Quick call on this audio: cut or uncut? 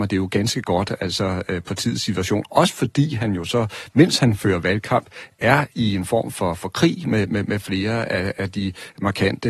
uncut